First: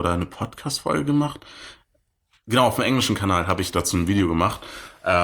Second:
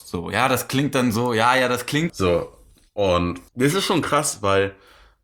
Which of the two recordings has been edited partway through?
second; 2 cuts; at 2.1 s, 3.5 s

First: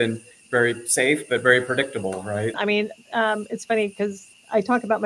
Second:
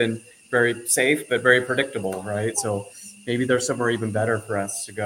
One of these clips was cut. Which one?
first; 1 cut; at 2.5 s

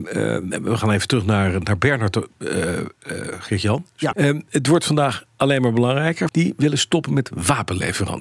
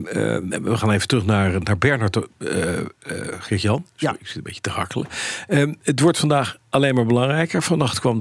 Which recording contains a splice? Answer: first; 2 cuts; at 4.1 s, 6.3 s

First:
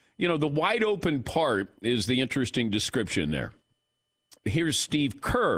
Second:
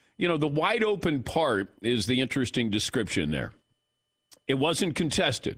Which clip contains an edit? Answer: first; 1 cut; at 4.4 s

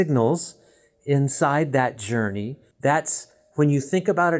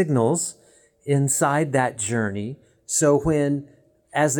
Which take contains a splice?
first; 1 cut; at 2.7 s

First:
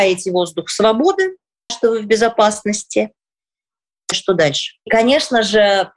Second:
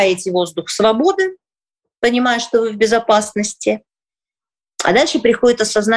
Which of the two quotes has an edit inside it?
first; 2 cuts; at 1.7 s, 4.1 s

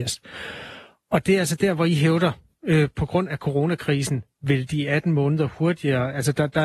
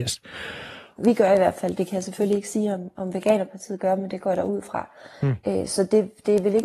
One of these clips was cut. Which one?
second; 1 cut; at 1.0 s

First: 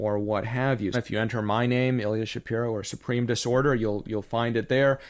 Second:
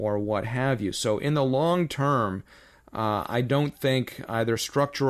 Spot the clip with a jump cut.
first; 1 cut; at 0.9 s

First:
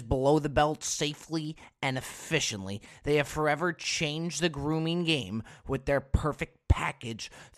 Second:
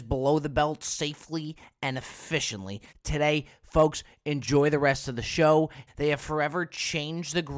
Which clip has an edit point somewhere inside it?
second; 2 cuts; at 2.9 s, 5.9 s

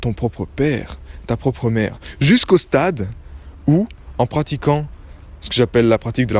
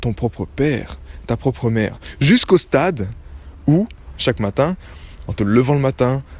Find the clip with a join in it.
second; 2 cuts; at 4.1 s, 5.3 s

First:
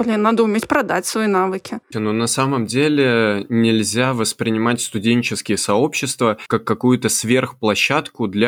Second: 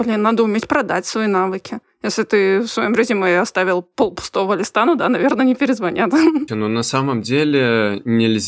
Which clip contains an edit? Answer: first; 1 cut; at 1.9 s

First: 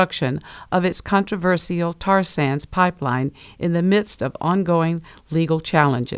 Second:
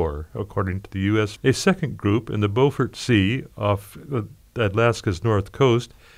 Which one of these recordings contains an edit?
second; 1 cut; at 1.4 s

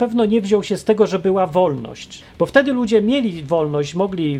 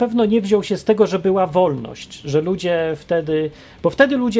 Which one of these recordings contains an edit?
first; 1 cut; at 2.2 s

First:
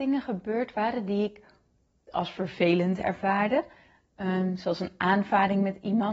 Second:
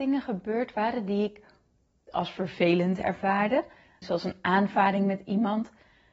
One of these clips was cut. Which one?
second; 1 cut; at 4.0 s

